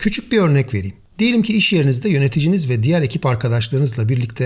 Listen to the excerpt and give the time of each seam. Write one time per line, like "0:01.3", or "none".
none